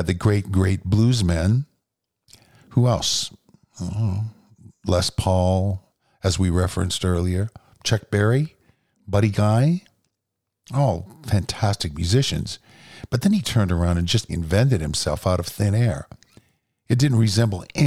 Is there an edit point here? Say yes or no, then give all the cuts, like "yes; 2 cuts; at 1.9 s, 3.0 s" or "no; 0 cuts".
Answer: yes; 1 cut; at 14.3 s